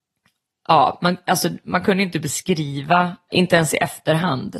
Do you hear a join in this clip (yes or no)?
no